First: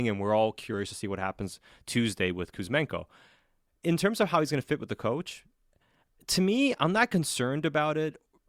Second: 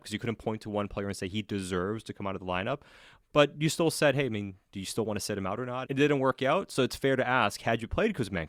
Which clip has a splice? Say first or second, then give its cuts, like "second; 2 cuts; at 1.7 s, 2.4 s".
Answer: second; 1 cut; at 5.8 s